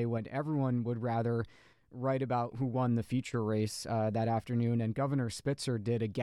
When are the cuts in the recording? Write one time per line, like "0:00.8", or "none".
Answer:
0:02.5